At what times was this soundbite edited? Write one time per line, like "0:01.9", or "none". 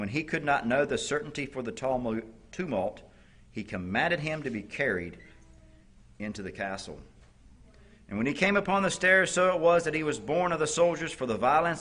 none